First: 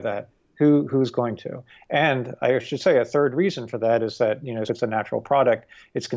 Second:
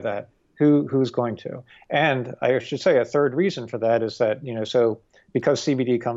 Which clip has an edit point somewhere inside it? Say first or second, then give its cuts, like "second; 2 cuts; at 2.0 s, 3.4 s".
first; 1 cut; at 4.7 s